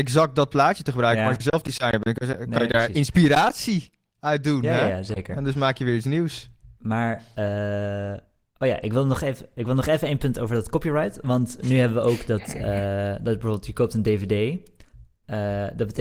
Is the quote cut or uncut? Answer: uncut